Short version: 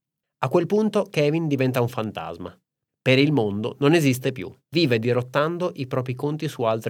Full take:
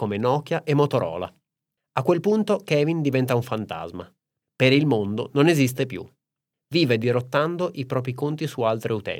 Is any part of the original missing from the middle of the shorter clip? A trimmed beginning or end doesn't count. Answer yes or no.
yes